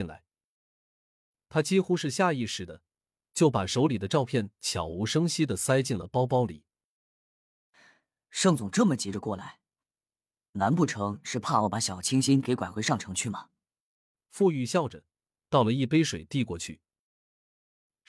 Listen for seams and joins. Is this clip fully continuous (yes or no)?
yes